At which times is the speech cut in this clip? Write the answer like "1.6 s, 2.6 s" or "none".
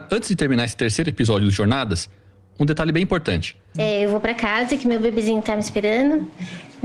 3.8 s